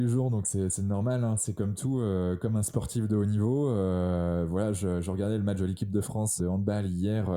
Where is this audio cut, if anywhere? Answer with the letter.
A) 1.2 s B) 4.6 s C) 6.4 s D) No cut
C